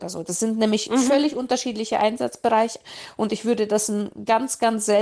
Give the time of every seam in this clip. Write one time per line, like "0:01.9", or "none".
none